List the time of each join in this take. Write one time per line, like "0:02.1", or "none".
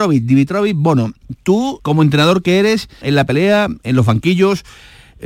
0:01.8
0:03.0